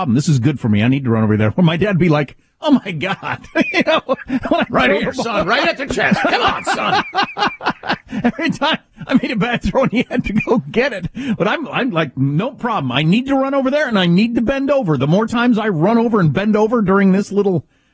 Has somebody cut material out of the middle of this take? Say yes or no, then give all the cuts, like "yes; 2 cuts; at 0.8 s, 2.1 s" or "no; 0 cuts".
no; 0 cuts